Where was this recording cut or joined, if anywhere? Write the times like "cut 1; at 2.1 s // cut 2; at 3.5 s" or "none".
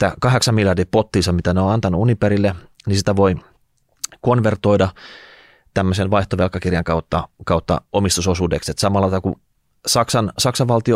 none